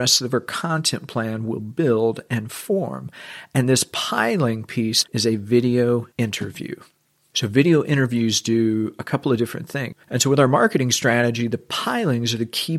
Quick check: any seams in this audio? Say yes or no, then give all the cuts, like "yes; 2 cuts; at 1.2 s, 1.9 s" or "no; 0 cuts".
yes; 3 cuts; at 5.0 s, 7.3 s, 9.9 s